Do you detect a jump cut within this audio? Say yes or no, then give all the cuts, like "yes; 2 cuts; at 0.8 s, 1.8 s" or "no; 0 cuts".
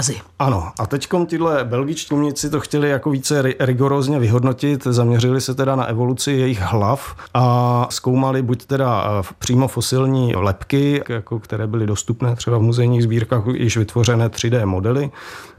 yes; 2 cuts; at 2.1 s, 11.0 s